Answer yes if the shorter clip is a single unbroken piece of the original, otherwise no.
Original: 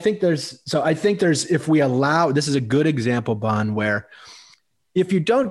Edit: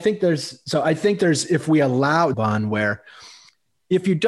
no